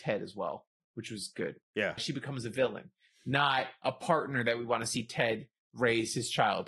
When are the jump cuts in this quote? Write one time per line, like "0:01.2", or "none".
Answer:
0:02.0